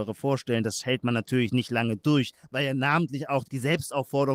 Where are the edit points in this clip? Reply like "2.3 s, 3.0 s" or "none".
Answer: 3.4 s